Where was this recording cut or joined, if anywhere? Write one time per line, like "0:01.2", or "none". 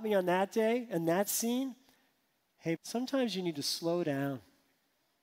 0:02.8